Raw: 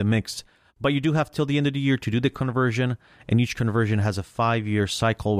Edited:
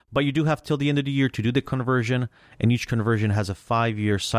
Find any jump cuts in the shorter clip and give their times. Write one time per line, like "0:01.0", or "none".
none